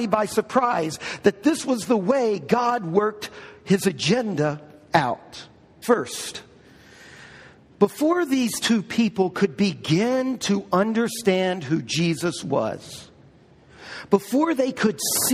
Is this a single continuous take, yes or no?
no